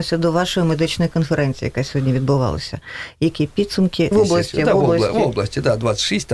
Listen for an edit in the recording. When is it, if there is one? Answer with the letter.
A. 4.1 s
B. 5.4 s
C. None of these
A